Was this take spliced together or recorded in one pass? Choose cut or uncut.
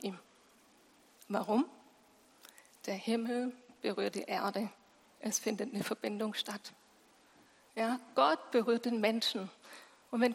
uncut